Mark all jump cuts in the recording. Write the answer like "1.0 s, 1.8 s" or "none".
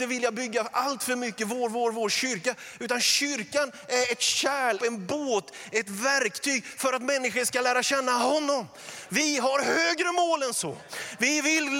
4.8 s, 9.1 s